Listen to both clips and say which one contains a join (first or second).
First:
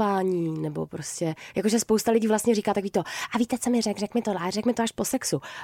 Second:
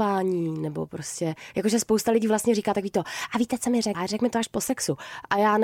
second